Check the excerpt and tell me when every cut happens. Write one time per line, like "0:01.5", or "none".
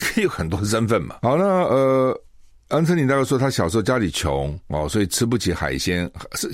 none